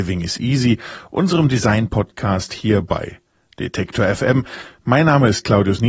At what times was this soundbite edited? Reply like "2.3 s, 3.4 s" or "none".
none